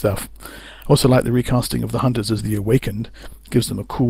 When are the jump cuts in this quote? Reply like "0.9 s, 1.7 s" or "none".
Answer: none